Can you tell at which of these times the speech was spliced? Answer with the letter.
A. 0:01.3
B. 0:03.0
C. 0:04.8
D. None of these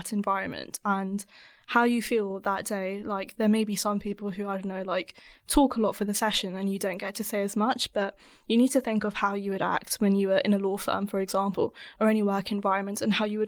D